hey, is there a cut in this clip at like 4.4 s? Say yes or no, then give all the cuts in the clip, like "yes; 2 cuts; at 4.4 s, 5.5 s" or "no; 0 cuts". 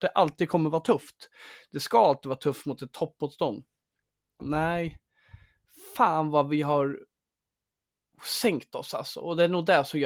yes; 1 cut; at 4.4 s